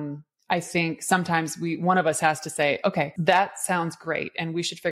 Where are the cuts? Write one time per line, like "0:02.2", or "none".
none